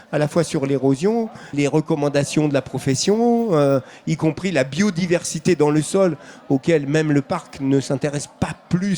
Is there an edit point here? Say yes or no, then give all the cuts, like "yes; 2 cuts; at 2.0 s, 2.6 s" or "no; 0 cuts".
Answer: yes; 1 cut; at 1.5 s